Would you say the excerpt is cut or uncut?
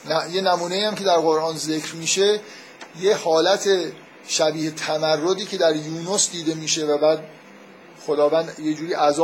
uncut